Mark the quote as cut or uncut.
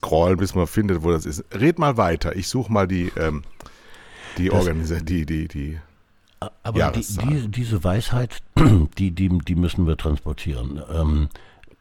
uncut